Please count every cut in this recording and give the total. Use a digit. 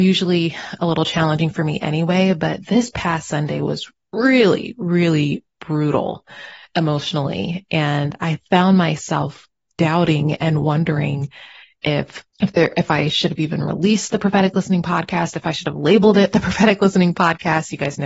1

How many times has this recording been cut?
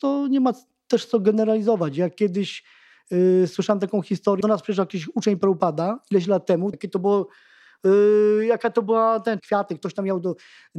3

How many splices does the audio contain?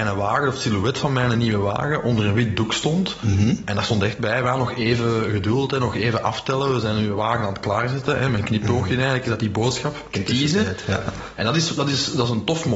2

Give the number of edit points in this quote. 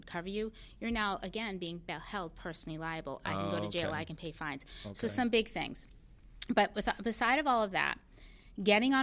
0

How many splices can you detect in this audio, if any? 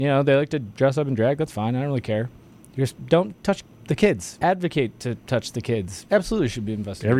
2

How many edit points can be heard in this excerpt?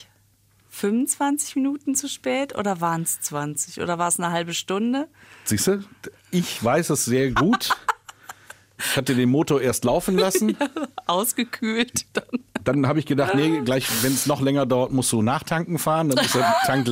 0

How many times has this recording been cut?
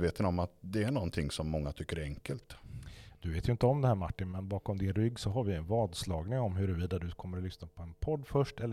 0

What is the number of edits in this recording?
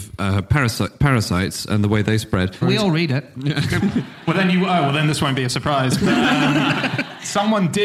1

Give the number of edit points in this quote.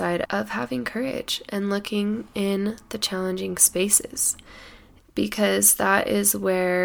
1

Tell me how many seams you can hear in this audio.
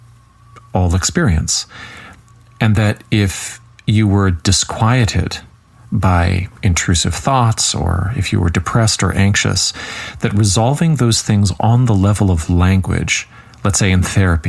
0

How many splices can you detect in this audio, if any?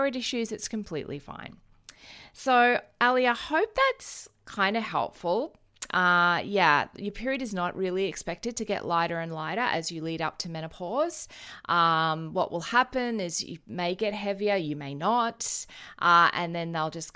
0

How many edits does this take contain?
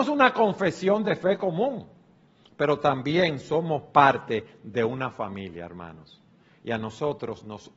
0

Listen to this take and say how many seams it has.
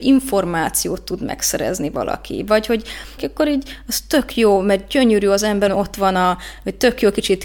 2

